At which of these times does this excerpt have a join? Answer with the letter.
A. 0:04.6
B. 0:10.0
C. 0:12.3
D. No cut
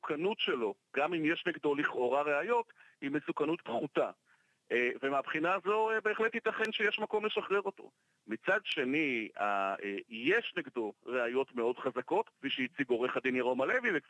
C